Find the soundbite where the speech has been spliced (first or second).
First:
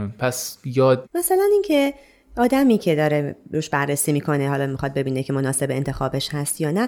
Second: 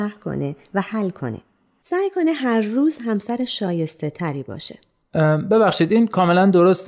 first